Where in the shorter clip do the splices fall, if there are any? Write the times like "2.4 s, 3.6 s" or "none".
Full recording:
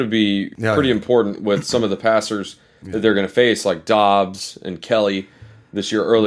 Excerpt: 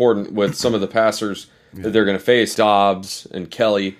2.5 s